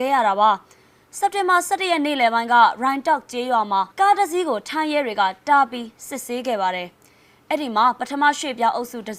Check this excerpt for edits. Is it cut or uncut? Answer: cut